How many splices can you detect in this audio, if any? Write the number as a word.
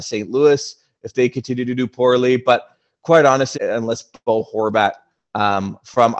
one